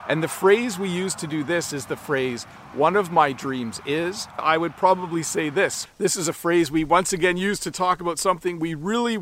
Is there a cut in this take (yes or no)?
yes